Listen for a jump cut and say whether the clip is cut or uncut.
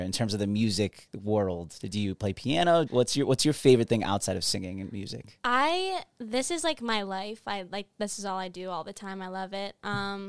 cut